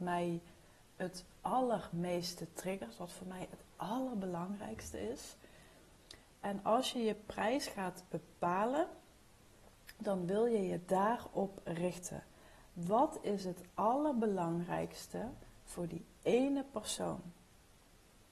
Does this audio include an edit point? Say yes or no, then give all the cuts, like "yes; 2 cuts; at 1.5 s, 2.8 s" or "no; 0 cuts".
no; 0 cuts